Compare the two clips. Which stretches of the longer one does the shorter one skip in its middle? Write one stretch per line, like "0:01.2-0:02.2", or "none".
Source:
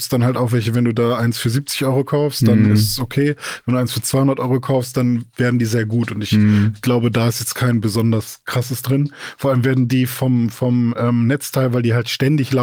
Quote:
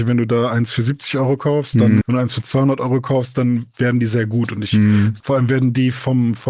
0:02.7-0:03.6
0:06.8-0:09.4